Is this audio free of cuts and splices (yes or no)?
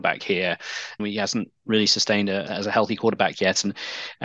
no